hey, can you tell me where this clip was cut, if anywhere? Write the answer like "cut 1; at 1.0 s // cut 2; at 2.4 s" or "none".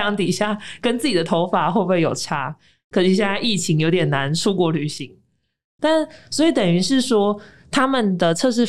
none